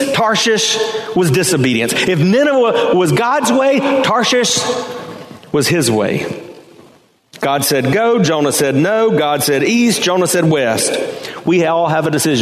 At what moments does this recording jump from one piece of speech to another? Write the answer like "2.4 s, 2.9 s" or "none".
none